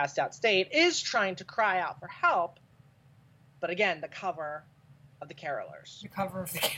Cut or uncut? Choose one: uncut